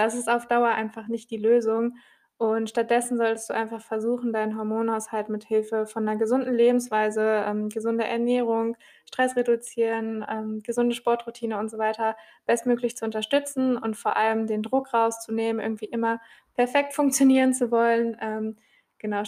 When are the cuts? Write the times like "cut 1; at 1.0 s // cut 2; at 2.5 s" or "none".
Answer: none